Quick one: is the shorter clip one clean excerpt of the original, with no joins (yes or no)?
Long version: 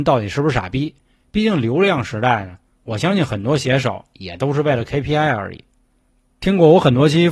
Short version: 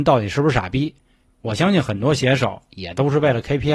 no